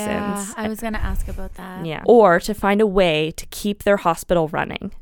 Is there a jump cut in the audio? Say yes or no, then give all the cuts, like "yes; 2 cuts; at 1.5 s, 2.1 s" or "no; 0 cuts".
yes; 1 cut; at 2.0 s